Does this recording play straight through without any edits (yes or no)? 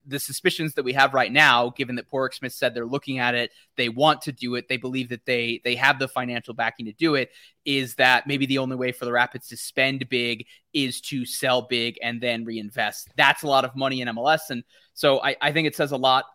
no